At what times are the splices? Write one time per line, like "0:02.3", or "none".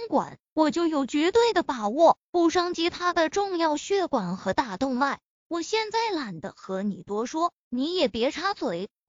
0:05.4